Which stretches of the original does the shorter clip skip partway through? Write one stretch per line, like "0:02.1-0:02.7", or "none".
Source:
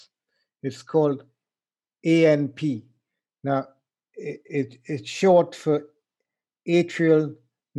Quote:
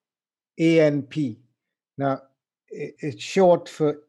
0:04.4-0:04.8